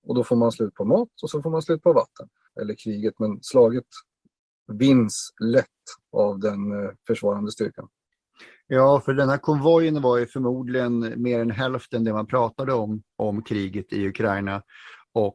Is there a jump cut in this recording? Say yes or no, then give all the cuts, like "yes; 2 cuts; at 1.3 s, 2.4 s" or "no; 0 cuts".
yes; 1 cut; at 2.5 s